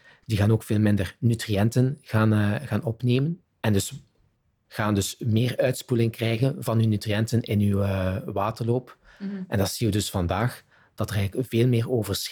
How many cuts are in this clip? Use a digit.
0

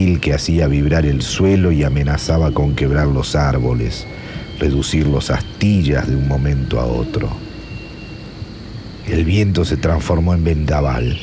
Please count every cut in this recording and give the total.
1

